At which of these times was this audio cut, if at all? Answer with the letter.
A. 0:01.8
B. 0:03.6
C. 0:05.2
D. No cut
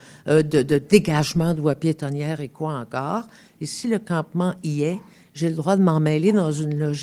B